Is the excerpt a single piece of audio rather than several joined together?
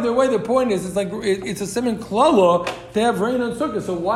yes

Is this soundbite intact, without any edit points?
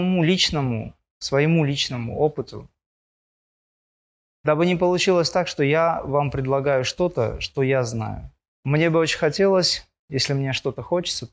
no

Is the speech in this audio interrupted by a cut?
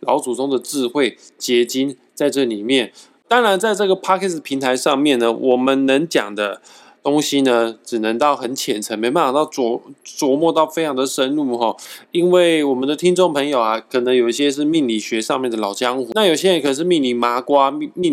no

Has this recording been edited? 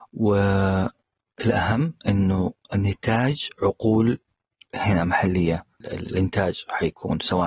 yes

